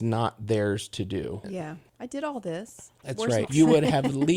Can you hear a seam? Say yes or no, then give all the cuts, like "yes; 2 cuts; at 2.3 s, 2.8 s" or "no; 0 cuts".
yes; 2 cuts; at 1.4 s, 3.5 s